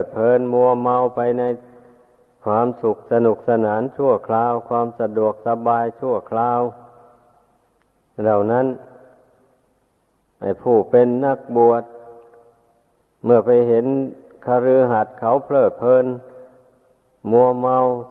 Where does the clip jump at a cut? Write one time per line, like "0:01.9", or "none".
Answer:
none